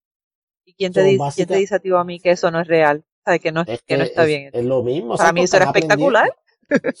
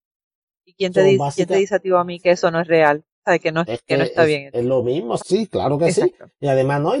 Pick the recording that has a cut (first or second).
second